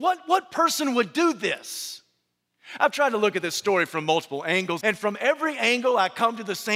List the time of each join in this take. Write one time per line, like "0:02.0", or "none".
0:04.8